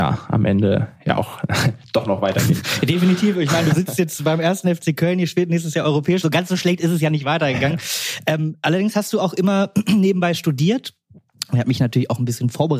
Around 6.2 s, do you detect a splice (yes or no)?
no